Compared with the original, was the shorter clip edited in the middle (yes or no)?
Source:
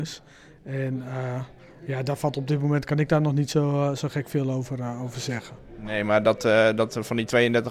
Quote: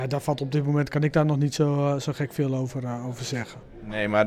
no